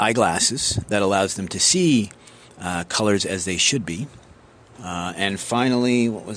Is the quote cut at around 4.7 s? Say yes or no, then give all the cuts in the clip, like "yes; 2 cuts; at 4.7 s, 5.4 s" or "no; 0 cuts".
yes; 1 cut; at 4.7 s